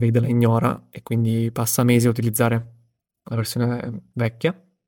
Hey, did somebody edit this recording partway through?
no; 0 cuts

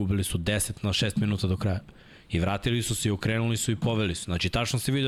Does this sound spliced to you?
no; 0 cuts

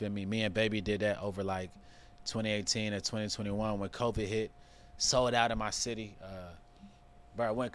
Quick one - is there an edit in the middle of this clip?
no; 0 cuts

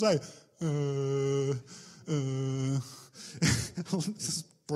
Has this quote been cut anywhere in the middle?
no; 0 cuts

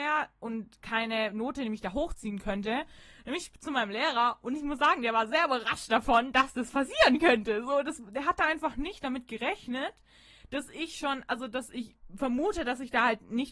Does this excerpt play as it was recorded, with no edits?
yes; 0 cuts

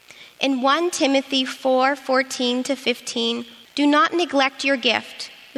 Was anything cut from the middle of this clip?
yes; 1 cut; at 3.7 s

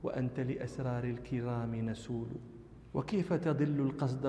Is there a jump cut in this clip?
yes; 1 cut; at 2.9 s

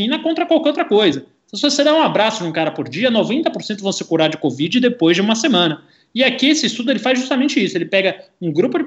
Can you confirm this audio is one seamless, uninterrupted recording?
yes; 0 cuts

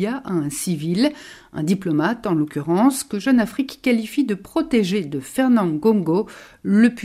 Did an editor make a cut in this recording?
no; 0 cuts

